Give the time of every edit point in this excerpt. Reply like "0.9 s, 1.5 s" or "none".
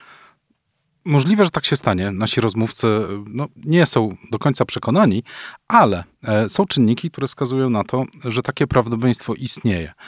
none